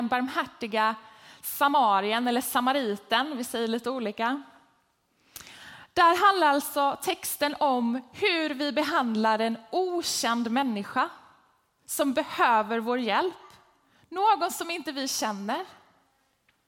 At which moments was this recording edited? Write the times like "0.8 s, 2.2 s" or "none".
none

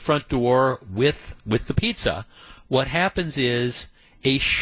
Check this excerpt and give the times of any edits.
none

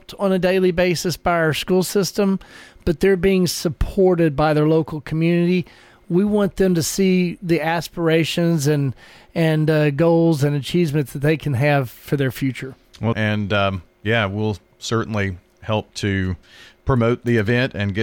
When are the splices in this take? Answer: 13.1 s

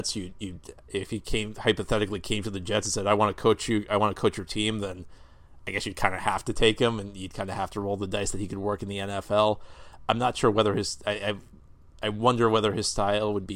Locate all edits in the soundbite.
none

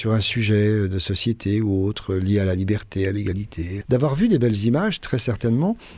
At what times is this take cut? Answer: 3.8 s

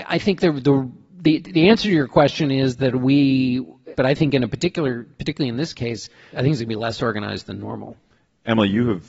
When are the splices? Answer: 3.9 s, 6.3 s

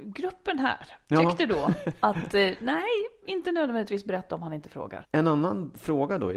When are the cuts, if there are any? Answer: 3.3 s, 5.0 s

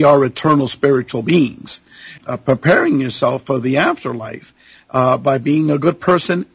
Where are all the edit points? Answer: 2.2 s

